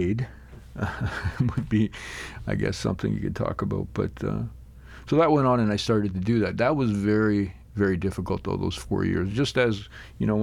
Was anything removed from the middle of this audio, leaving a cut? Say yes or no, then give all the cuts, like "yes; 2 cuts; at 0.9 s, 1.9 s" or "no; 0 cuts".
no; 0 cuts